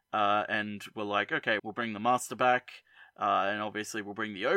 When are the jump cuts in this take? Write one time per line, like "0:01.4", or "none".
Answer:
0:01.6